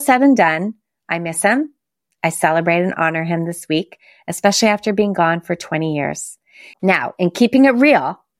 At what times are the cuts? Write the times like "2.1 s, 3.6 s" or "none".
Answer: 6.7 s